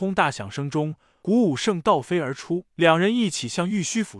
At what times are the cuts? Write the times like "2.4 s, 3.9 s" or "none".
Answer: 1.1 s, 2.7 s